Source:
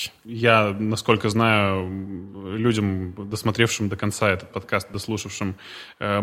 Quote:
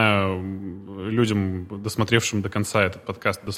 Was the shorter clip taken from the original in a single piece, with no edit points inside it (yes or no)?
yes